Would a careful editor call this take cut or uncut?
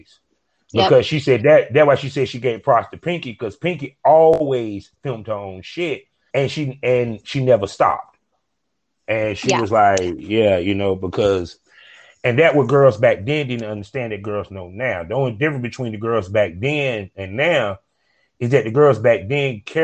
cut